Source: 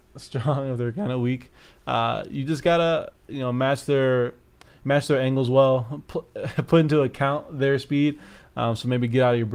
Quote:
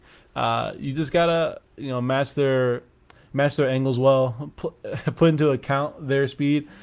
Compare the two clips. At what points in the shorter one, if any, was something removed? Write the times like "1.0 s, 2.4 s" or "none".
none

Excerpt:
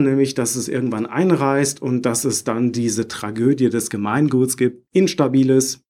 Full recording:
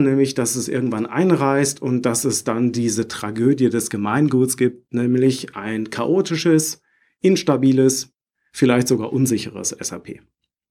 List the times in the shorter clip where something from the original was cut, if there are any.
4.9 s

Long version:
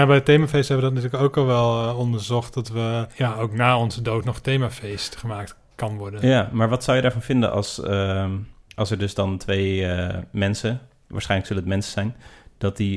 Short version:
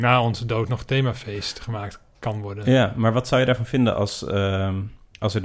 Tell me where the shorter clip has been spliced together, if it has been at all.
none

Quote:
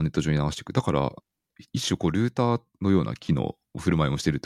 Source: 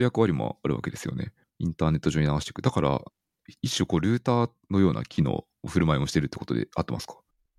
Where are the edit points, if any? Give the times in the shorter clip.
none

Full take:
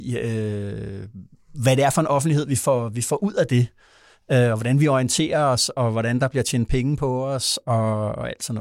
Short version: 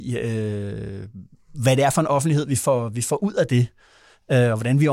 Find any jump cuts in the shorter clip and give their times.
none

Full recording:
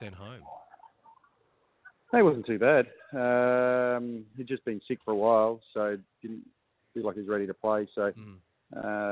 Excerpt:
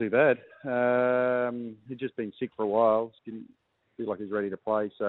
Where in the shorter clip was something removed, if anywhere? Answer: 3.2 s

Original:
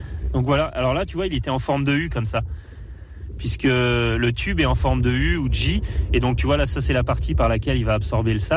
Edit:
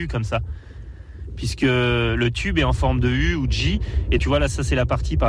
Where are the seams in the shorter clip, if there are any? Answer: 4.2 s

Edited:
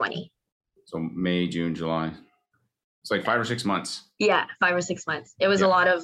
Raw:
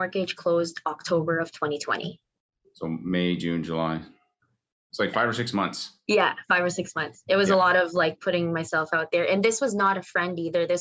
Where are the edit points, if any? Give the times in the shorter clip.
none

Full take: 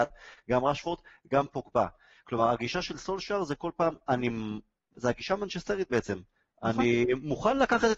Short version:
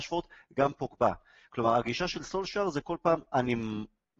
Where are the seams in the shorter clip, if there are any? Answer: none

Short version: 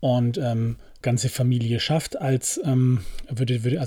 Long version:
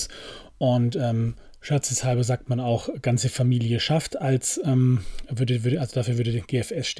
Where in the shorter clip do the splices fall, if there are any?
1.0 s

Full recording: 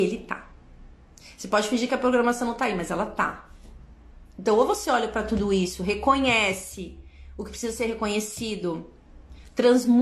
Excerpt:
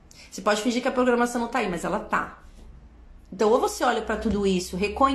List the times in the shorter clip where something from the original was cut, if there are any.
none

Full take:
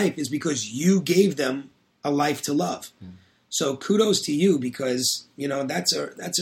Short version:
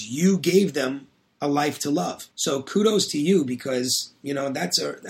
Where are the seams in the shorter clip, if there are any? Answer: 2.3 s

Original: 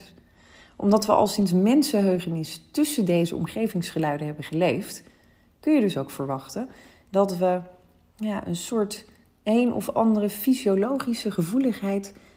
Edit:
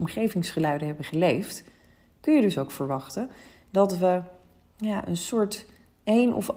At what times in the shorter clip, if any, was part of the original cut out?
none

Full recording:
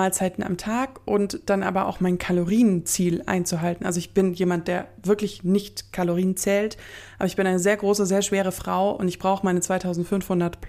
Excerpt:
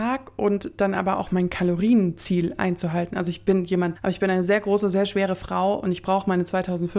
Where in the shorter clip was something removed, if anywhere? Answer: 4.0 s

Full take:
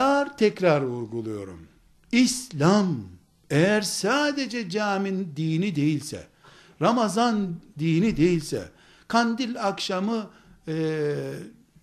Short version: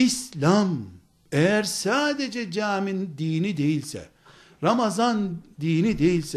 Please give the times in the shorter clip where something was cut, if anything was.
none

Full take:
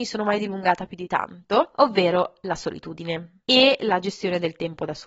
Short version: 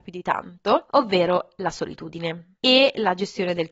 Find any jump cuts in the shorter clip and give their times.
none

